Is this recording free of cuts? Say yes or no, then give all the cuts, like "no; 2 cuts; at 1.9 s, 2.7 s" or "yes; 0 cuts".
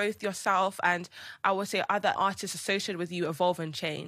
no; 1 cut; at 2.2 s